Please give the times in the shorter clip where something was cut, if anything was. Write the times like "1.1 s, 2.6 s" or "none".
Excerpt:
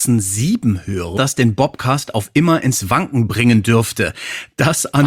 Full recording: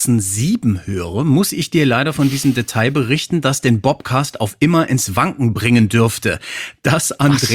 1.2 s